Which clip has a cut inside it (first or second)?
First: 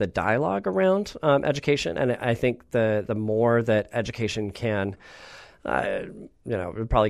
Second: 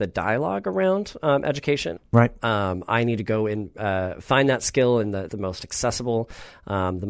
second